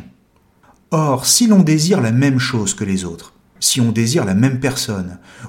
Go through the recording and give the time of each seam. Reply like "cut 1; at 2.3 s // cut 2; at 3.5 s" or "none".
cut 1; at 3.6 s